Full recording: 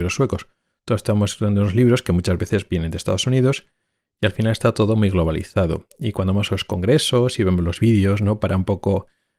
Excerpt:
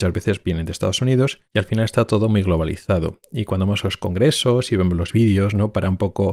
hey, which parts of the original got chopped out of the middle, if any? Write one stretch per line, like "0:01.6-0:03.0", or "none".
0:03.7-0:04.1